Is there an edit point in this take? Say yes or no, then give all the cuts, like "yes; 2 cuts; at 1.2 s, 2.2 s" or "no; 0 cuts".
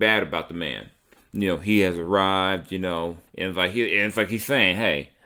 yes; 2 cuts; at 1.2 s, 3.3 s